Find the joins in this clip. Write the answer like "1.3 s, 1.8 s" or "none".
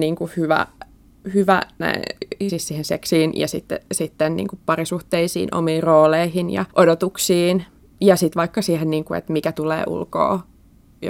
2.5 s, 6.7 s